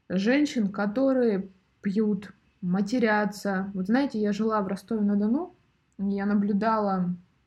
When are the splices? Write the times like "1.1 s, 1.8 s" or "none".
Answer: none